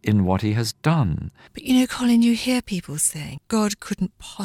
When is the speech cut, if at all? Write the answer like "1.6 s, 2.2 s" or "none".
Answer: 1.5 s, 3.4 s

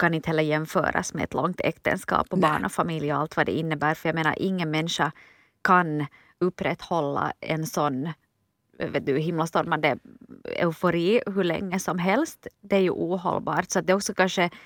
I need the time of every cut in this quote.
none

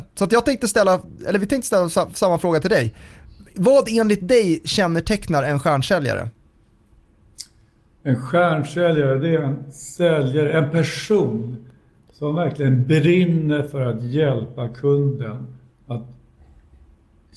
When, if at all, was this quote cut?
none

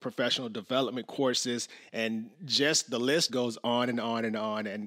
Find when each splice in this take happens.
3.3 s

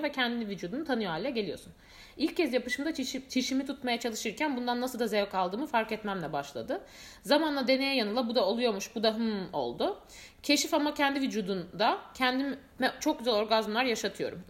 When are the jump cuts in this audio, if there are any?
3.3 s

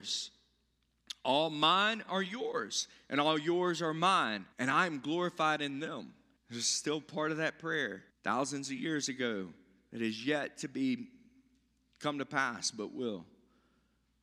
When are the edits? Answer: 4.5 s, 6.4 s, 8.1 s

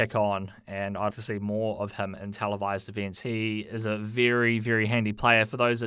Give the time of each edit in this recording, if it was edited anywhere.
1.1 s

